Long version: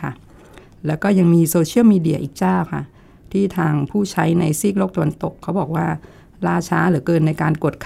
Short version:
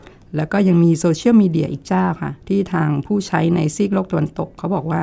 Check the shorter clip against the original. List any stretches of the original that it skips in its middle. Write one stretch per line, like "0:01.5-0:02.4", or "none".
0:02.9-0:03.3